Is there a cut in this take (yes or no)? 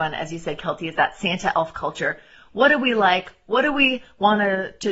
no